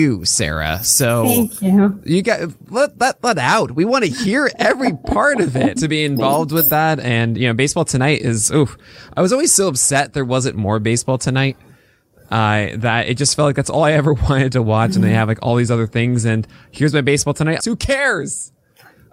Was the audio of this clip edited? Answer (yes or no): yes